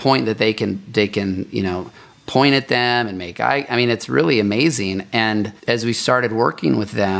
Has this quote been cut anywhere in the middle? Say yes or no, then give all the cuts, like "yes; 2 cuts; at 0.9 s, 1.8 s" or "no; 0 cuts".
yes; 1 cut; at 5.6 s